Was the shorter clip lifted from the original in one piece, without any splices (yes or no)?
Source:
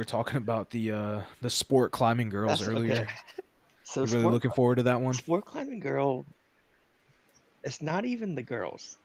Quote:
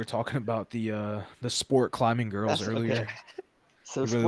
yes